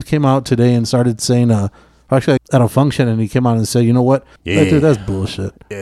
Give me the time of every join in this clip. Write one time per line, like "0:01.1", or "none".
0:02.4
0:04.4